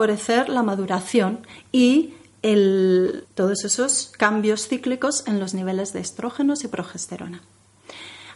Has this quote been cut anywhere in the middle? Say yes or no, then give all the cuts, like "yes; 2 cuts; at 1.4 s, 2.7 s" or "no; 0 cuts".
yes; 1 cut; at 3.2 s